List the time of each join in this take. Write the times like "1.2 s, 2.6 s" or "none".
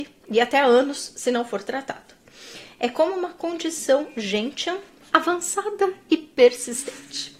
none

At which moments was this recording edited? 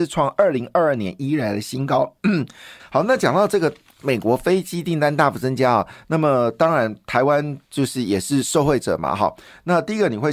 2.8 s

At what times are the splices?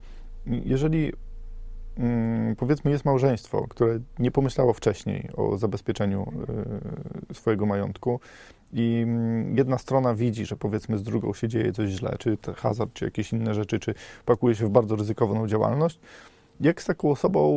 12.9 s

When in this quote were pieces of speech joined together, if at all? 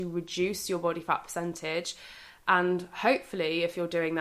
none

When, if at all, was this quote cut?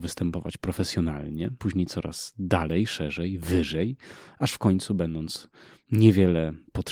1.6 s

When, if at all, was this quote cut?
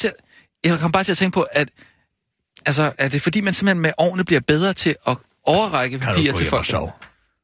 none

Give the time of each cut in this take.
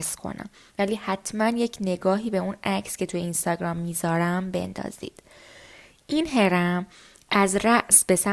none

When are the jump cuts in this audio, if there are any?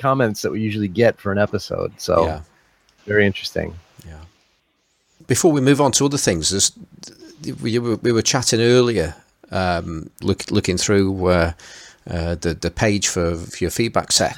10.2 s

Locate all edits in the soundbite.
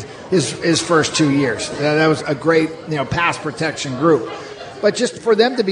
2.2 s

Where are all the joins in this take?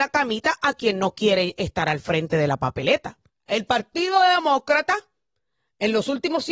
3.3 s

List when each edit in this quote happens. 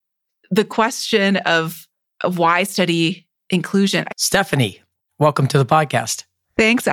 4.1 s

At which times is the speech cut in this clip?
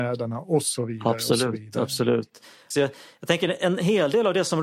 2.7 s

